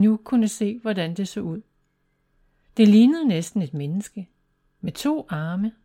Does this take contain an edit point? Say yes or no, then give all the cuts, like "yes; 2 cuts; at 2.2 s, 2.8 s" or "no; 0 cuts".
no; 0 cuts